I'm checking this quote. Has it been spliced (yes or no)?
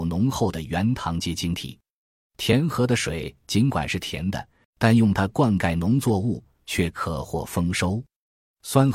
yes